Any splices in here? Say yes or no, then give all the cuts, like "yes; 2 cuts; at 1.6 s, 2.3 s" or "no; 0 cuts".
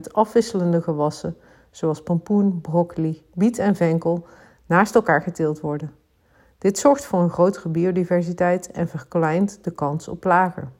no; 0 cuts